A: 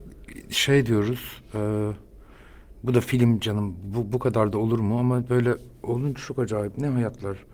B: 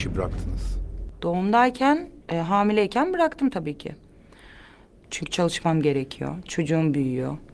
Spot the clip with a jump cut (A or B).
B